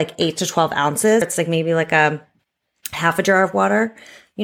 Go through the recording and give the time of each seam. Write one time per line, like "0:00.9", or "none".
0:01.2